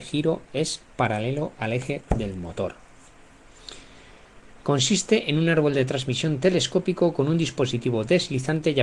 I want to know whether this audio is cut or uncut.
uncut